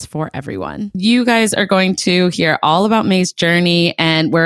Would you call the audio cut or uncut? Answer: uncut